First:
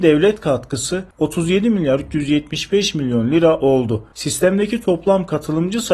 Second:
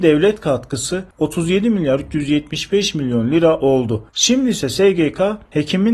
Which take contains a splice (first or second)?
second